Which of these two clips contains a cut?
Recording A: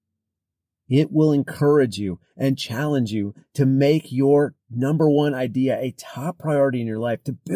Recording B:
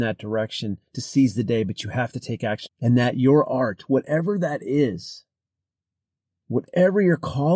B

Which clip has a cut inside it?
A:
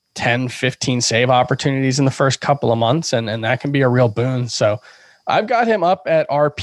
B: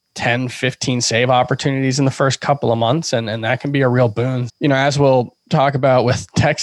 B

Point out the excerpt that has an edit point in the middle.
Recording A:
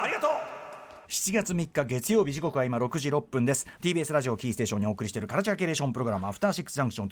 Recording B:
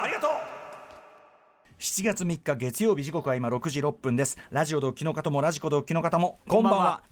A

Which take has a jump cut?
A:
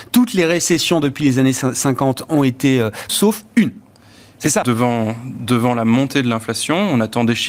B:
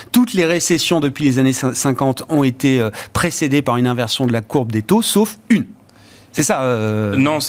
A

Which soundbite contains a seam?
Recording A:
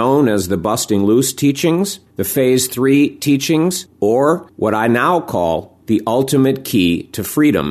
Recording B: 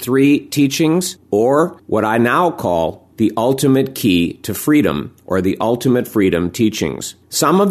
A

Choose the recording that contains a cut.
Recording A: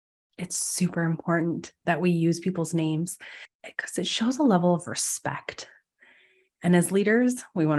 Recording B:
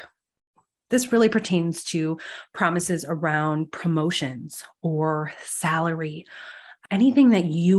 B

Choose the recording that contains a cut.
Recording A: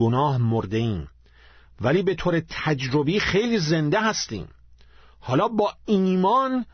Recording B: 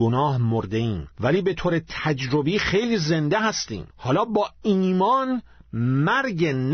B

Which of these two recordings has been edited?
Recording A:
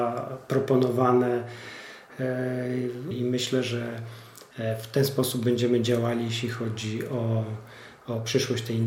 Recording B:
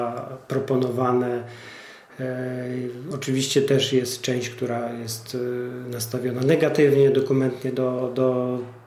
A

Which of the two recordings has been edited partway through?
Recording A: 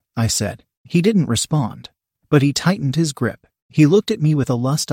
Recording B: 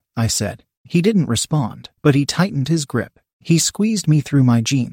B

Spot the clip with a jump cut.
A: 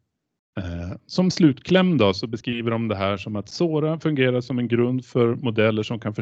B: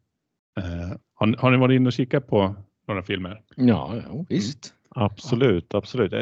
B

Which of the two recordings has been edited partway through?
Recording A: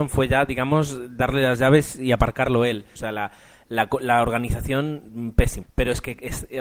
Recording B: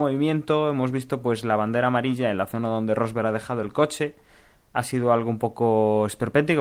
A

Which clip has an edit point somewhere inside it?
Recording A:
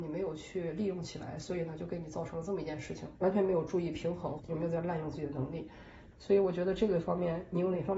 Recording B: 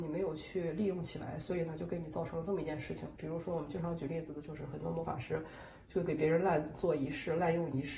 A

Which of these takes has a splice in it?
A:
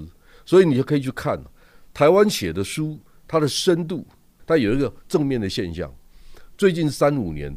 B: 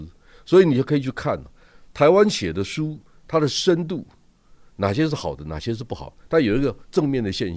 A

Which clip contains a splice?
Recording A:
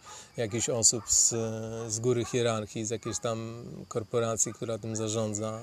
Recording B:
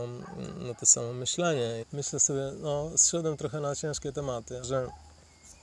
B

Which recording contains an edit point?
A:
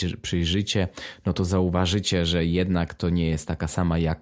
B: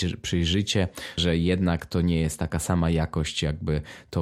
B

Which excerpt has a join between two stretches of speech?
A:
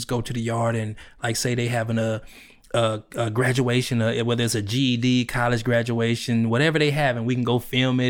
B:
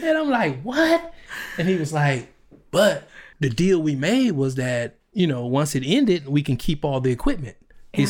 B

